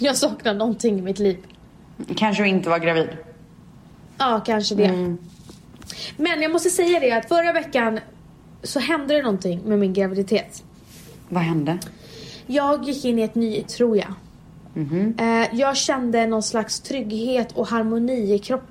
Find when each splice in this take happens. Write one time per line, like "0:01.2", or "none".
0:13.7